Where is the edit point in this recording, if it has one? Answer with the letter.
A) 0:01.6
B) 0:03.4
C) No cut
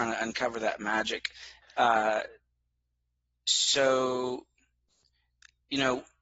A